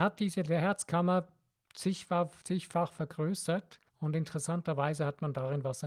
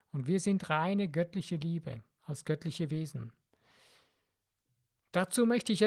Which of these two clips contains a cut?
first; 2 cuts; at 2.4 s, 3.9 s

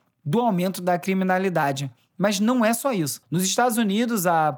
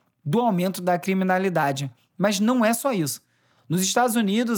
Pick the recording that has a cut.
first; 1 cut; at 3.2 s

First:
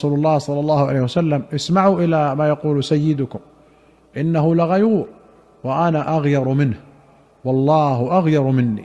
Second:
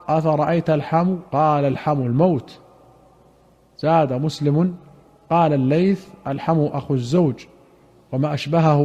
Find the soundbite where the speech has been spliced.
second; 1 cut; at 1.3 s

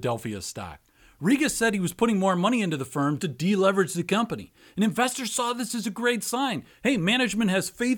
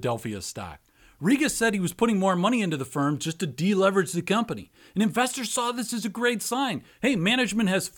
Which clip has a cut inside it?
first; 1 cut; at 3.2 s

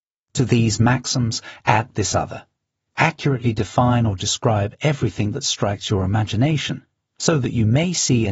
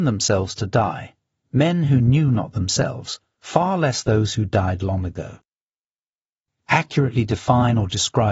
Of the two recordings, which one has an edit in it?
second; 1 cut; at 6.5 s

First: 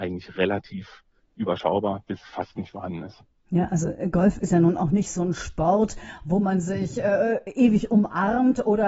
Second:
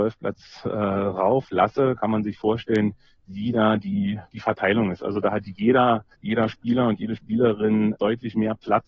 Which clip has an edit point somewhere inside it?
second; 2 cuts; at 6.1 s, 7.9 s

